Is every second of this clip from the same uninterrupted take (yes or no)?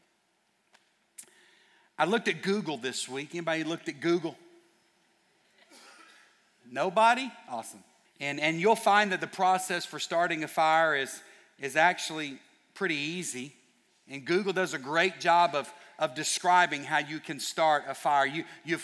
no